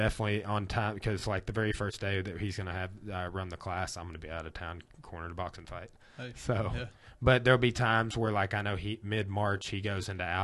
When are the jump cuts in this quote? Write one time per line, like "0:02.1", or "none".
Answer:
none